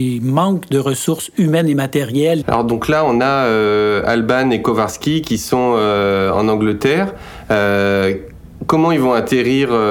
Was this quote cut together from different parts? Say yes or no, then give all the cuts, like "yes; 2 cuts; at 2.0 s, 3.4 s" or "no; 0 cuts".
yes; 1 cut; at 2.4 s